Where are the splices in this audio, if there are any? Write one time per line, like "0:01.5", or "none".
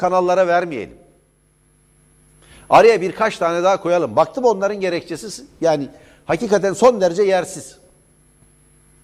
none